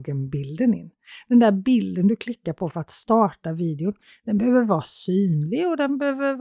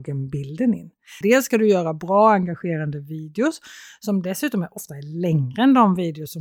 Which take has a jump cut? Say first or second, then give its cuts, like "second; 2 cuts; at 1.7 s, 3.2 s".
second; 1 cut; at 1.2 s